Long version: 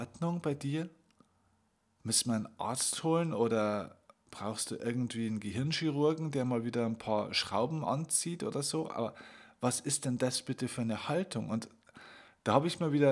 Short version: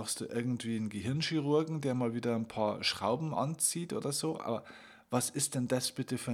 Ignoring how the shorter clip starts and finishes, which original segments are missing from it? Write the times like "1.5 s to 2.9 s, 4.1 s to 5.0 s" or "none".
none